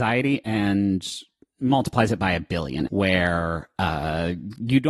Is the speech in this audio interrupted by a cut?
yes; 1 cut; at 2.9 s

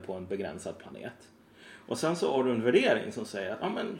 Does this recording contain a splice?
no; 0 cuts

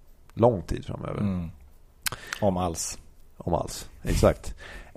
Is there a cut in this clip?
no; 0 cuts

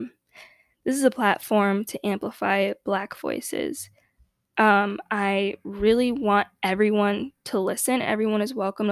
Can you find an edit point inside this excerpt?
no; 0 cuts

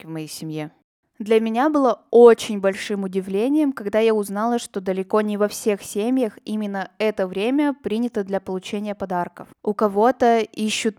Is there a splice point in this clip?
no; 0 cuts

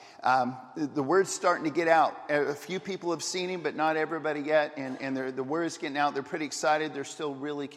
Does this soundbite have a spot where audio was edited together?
no; 0 cuts

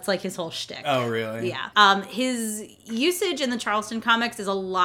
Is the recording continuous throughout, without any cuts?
no; 1 cut; at 1.7 s

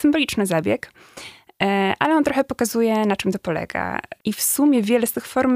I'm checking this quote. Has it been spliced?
yes; 1 cut; at 4.2 s

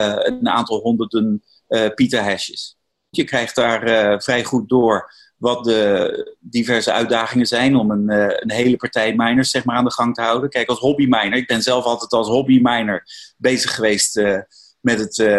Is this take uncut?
no; 1 cut; at 3.1 s

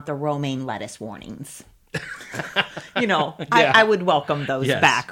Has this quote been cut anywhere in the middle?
no; 0 cuts

